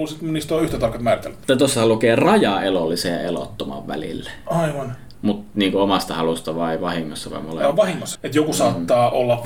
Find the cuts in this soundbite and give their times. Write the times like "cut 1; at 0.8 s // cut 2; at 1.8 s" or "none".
cut 1; at 5.1 s // cut 2; at 8.1 s